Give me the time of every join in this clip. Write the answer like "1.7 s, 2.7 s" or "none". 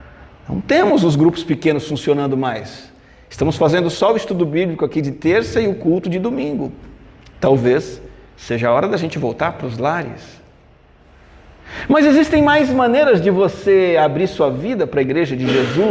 none